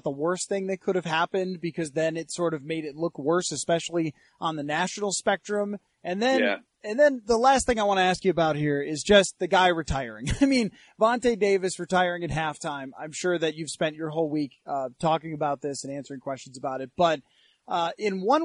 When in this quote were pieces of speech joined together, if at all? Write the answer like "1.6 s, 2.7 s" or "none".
none